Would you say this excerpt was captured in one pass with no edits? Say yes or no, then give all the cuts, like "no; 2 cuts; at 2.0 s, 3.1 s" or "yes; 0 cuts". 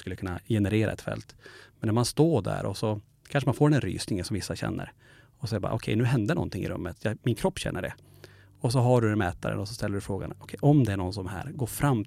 yes; 0 cuts